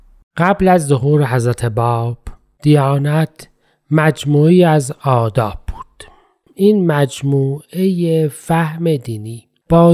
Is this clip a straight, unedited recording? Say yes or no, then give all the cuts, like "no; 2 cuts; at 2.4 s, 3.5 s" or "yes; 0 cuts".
yes; 0 cuts